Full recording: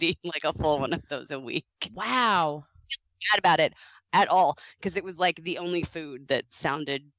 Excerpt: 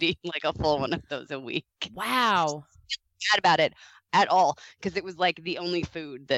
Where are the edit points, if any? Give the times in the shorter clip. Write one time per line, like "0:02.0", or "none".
none